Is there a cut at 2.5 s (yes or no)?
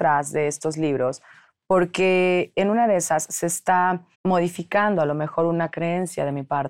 yes